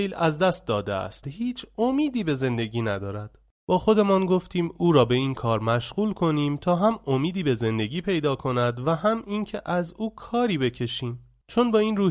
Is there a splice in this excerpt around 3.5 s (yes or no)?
no